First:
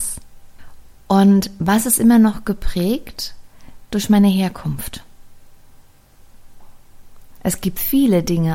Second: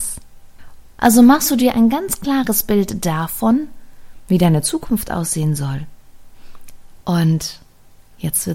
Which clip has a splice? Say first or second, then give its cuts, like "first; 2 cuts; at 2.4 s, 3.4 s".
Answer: second; 2 cuts; at 1.0 s, 7.0 s